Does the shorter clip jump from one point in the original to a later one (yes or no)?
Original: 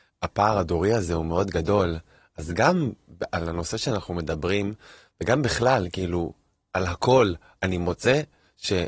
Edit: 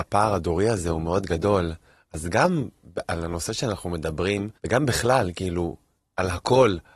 yes